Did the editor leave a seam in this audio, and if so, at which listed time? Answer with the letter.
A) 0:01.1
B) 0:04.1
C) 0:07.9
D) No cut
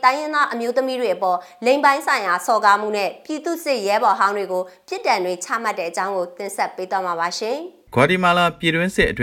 C